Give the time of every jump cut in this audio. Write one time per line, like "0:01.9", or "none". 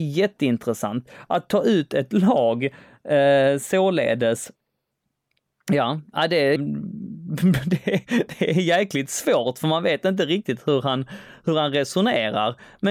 0:06.6